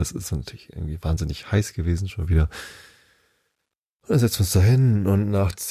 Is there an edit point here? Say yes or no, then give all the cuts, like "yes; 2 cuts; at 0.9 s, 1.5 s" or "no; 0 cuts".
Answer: no; 0 cuts